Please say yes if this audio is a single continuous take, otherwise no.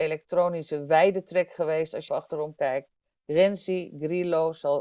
no